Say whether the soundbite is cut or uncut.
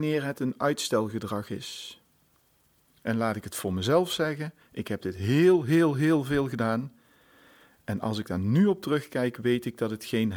cut